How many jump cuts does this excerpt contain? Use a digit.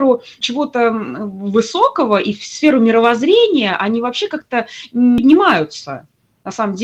0